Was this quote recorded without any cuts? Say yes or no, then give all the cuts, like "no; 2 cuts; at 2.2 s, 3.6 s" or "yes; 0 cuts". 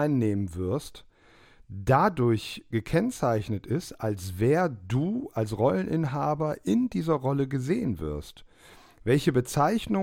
yes; 0 cuts